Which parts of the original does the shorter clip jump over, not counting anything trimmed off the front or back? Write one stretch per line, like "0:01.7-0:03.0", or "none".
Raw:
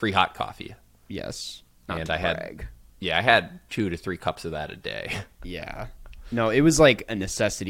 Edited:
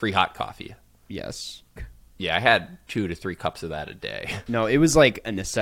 0:01.8-0:02.6
0:05.3-0:06.3